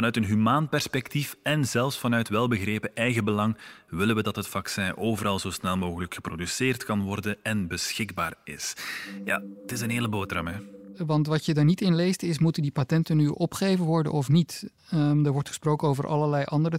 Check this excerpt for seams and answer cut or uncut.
cut